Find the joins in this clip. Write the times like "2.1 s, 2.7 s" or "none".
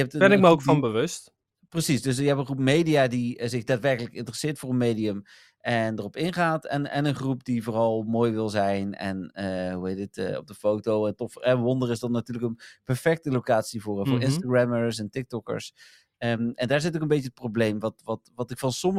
16.1 s